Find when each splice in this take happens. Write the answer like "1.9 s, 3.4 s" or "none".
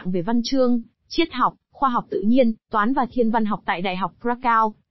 none